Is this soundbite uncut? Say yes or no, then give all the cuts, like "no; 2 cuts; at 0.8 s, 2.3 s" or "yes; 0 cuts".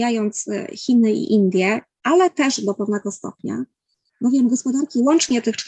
yes; 0 cuts